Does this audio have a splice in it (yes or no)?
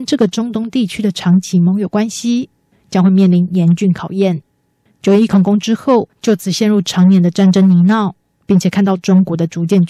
yes